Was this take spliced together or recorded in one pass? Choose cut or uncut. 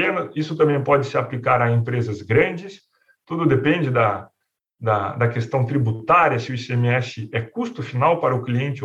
uncut